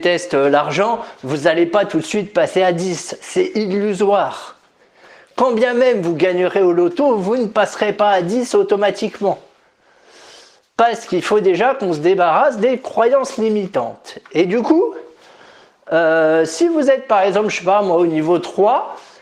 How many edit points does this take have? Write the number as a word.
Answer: zero